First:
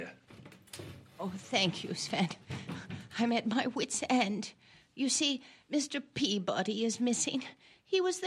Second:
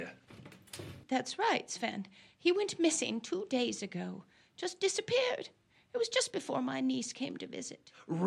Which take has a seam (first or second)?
second